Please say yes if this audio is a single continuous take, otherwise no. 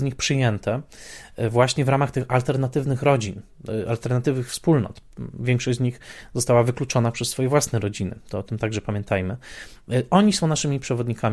yes